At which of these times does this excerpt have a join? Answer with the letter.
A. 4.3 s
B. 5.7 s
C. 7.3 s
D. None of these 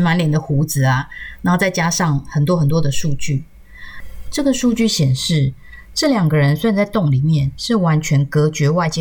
D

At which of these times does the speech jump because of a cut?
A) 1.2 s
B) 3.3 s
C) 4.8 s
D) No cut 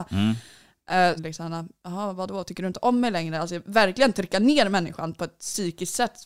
A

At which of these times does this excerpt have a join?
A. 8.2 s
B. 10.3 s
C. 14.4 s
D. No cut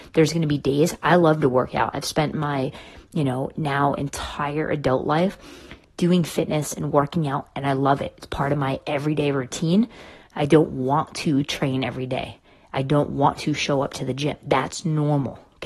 B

